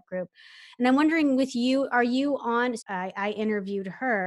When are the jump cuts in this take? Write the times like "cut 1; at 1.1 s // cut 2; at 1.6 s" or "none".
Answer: cut 1; at 2.8 s